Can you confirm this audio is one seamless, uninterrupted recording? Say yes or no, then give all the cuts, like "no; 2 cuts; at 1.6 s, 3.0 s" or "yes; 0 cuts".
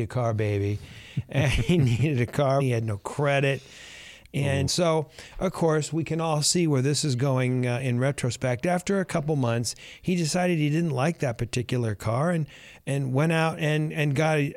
no; 2 cuts; at 2.6 s, 4.7 s